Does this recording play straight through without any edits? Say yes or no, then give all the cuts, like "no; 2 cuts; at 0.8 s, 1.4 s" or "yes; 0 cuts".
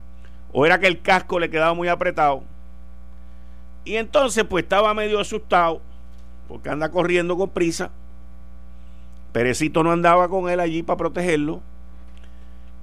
yes; 0 cuts